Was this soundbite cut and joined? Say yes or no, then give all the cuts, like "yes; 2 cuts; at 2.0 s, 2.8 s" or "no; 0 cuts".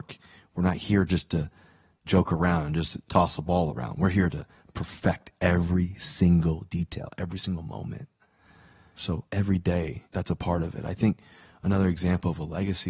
no; 0 cuts